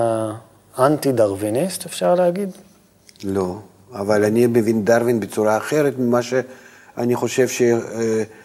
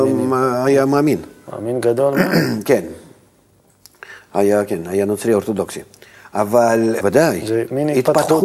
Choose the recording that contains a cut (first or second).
second